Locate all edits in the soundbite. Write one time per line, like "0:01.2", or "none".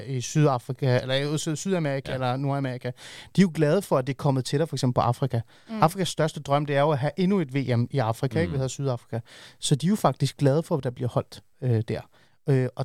none